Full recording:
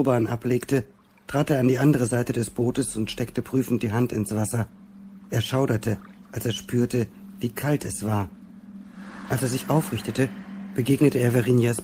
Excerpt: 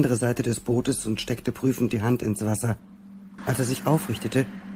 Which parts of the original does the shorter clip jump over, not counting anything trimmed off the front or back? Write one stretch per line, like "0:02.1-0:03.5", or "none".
0:05.3-0:09.2